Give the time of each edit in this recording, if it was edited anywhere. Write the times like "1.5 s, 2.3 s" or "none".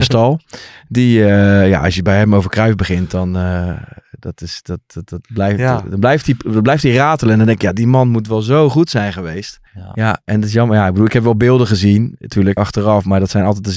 9.7 s, 12.6 s